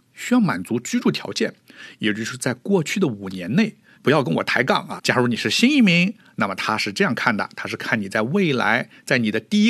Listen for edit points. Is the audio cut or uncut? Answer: cut